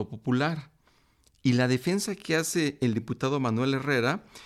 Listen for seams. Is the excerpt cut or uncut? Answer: uncut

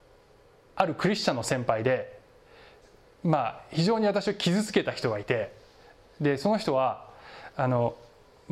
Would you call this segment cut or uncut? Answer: uncut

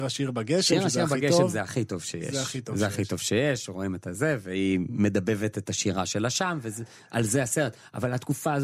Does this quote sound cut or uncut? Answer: uncut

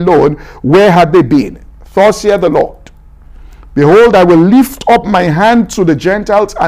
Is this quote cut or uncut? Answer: uncut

